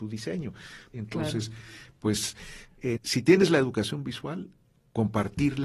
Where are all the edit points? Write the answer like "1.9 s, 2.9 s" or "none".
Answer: 0.9 s, 3.0 s